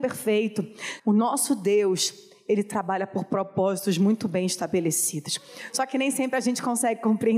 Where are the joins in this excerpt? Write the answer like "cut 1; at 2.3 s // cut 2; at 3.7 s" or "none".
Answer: cut 1; at 1.0 s